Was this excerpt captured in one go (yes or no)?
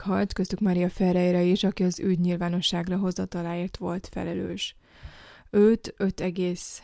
yes